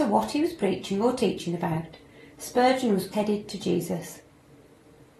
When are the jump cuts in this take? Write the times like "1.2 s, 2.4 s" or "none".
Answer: 3.1 s

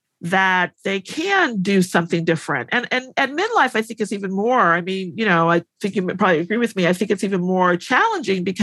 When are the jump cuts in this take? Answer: none

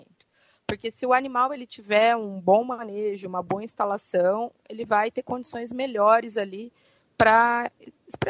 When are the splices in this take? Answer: none

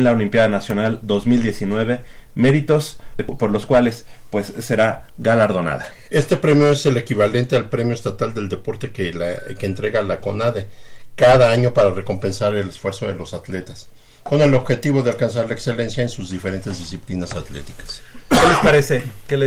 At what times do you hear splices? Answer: 6.1 s

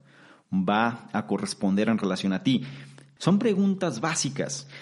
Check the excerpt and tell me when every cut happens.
3.2 s

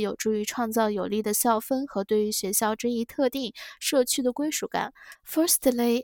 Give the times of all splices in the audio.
5.1 s

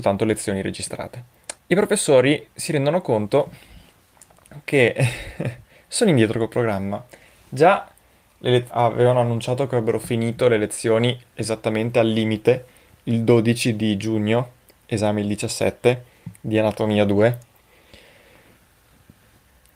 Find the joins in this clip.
1.6 s, 8.7 s

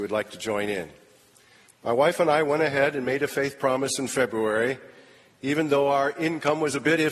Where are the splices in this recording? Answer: 1.6 s

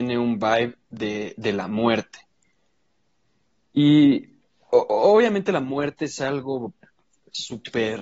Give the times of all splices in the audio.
none

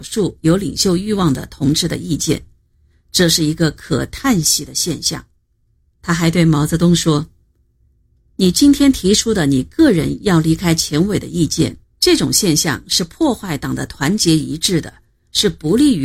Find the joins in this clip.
5.9 s, 11.8 s

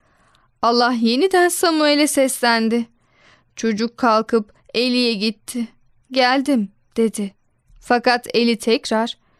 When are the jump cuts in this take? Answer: 6.0 s

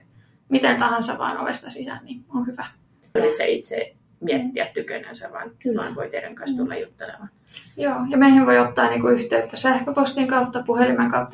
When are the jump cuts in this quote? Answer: 3.2 s

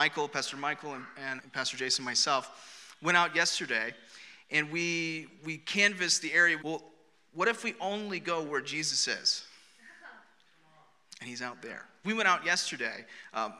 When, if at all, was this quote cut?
1.4 s, 6.6 s, 12.0 s

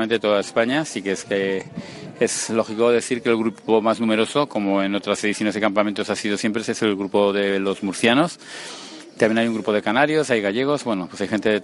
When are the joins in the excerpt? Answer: none

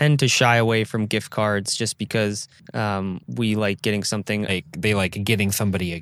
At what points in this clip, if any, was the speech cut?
4.5 s

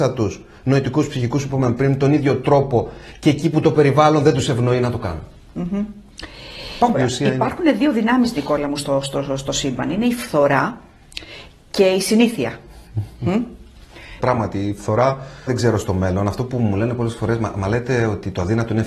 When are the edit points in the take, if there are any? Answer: 6.9 s, 14.2 s, 15.5 s

